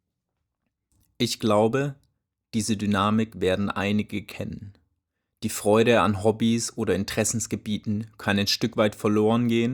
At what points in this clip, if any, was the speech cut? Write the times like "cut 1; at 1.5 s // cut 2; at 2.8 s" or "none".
none